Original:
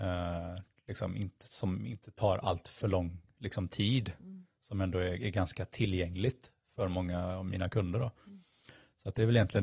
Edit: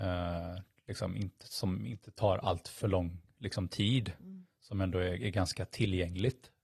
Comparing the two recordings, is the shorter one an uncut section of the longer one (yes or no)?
yes